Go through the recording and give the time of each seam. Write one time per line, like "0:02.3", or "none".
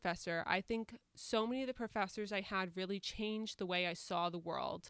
none